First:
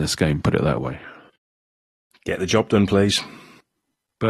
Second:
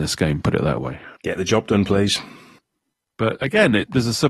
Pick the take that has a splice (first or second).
second